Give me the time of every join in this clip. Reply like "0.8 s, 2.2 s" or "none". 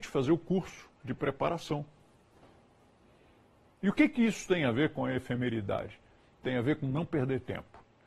none